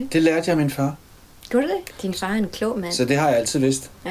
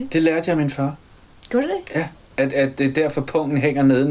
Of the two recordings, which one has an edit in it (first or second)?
first